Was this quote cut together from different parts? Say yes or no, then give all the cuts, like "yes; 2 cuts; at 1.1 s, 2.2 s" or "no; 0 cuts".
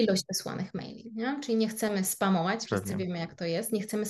yes; 1 cut; at 2.6 s